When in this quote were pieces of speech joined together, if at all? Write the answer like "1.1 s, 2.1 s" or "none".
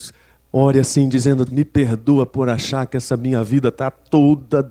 1.5 s